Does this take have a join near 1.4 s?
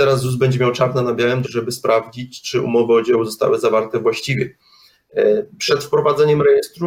yes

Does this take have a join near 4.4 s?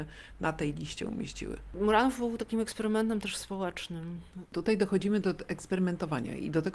yes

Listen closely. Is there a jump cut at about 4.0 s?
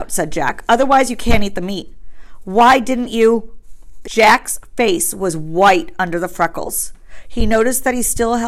yes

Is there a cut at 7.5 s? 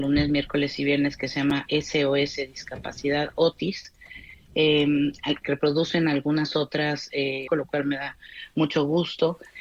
yes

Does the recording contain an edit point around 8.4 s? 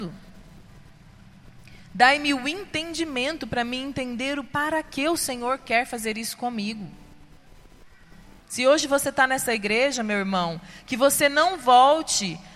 yes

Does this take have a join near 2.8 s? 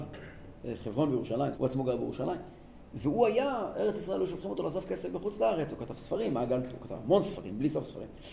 no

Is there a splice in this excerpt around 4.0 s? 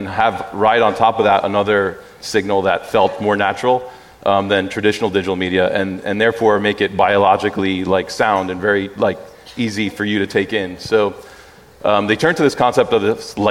no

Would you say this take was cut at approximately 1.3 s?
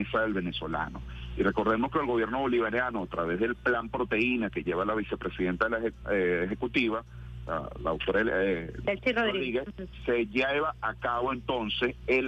no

